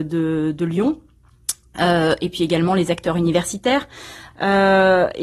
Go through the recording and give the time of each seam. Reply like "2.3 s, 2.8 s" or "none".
4.3 s